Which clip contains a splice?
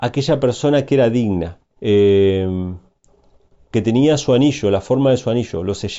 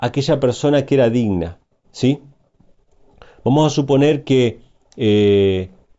first; 1 cut; at 1.7 s

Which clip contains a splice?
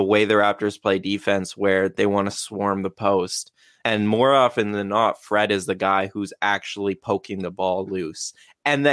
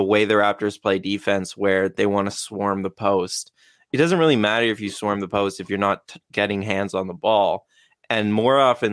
first; 1 cut; at 3.8 s

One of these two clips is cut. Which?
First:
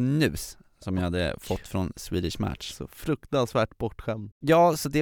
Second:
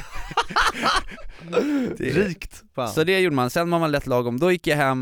second; 1 cut; at 2.7 s

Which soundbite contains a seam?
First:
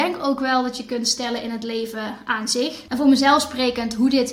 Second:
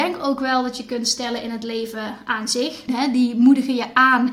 second; 1 cut; at 2.9 s

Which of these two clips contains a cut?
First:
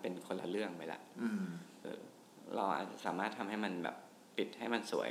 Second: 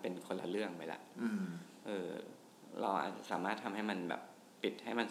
first; 1 cut; at 1.8 s

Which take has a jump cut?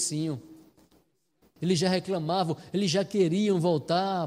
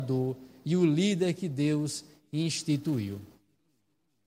first; 1 cut; at 1.6 s

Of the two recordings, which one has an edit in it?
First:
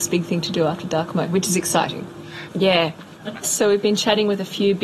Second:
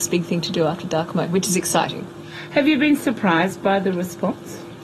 first; 1 cut; at 2.5 s

